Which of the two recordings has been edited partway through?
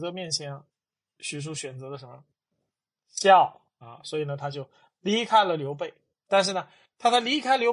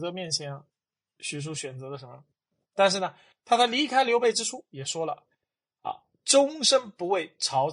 second; 1 cut; at 2.6 s

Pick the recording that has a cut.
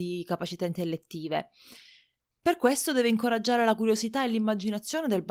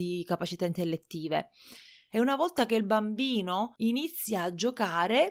second; 1 cut; at 2.1 s

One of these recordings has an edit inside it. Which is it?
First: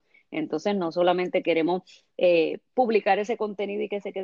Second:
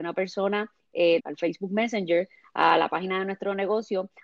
second; 1 cut; at 1.2 s

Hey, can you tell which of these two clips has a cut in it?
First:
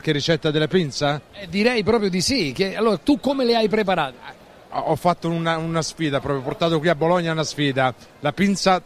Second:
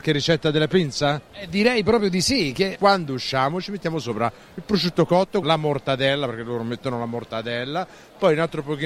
second; 2 cuts; at 2.7 s, 5.4 s

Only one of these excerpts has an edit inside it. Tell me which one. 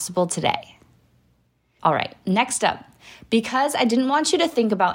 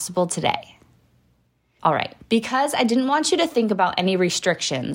second; 1 cut; at 2.2 s

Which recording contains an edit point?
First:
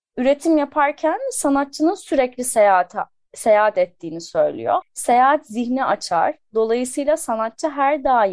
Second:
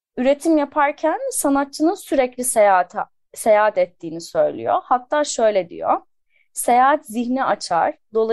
first; 1 cut; at 4.8 s

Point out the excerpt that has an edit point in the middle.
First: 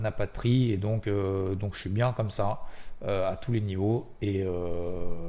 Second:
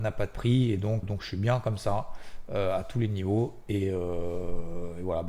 second; 1 cut; at 1.0 s

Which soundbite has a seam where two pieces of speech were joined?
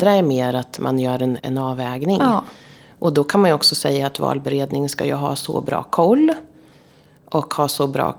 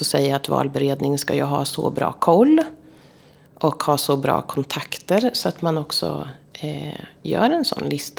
first; 1 cut; at 1.4 s

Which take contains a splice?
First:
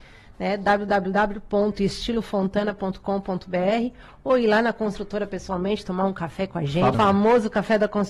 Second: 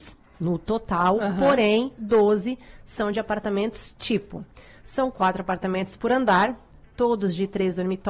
first; 1 cut; at 6.9 s

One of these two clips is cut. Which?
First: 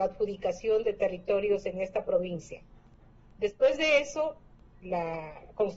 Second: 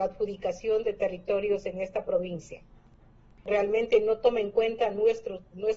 second; 1 cut; at 3.4 s

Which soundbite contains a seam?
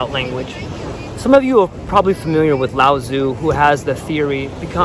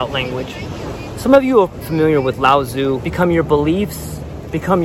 second; 2 cuts; at 1.8 s, 3.0 s

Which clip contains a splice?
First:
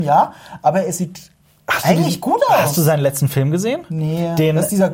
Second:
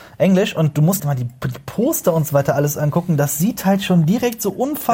second; 1 cut; at 1.0 s

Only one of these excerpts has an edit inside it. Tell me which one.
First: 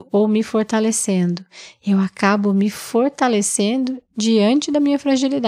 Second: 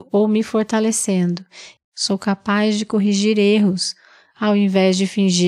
second; 1 cut; at 1.8 s

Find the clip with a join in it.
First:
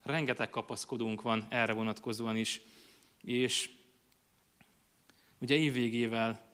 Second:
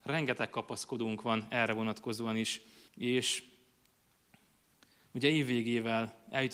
second; 1 cut; at 2.9 s

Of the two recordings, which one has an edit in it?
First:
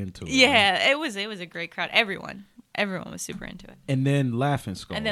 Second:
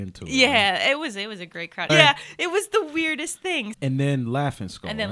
second; 2 cuts; at 1.9 s, 3.7 s

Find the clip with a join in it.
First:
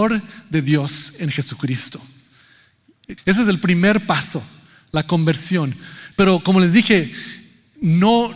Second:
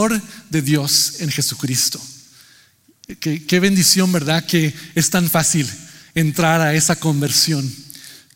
first; 2 cuts; at 3.2 s, 6.1 s

